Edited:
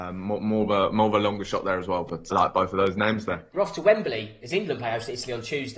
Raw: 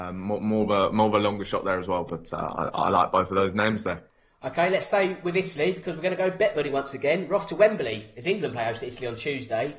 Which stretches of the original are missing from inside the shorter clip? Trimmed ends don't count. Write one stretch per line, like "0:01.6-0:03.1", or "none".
0:02.3-0:02.9
0:04.1-0:07.3